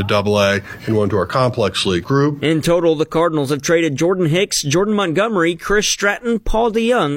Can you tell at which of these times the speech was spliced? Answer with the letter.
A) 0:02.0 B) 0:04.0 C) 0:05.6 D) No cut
A